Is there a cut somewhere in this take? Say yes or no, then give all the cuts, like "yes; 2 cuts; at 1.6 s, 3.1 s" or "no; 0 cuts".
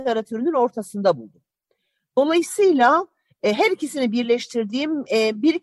no; 0 cuts